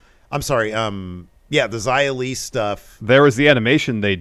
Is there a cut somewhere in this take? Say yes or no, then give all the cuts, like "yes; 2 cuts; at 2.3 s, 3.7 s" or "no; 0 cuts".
yes; 1 cut; at 1.4 s